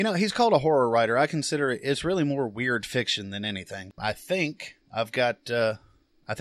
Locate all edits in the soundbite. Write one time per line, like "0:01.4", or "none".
0:04.0